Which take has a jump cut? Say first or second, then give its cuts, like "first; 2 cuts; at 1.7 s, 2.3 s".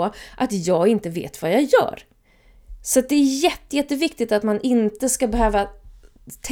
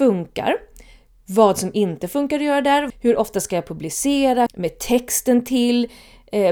second; 2 cuts; at 2.9 s, 4.5 s